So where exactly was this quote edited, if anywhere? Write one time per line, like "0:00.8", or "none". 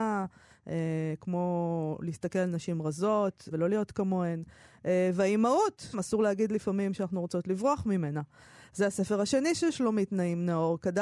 0:03.5
0:05.9